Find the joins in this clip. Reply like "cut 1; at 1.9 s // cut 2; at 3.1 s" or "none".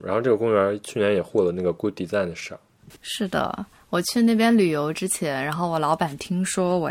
cut 1; at 3.0 s